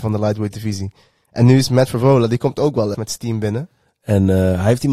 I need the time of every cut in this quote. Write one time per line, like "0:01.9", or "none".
0:02.9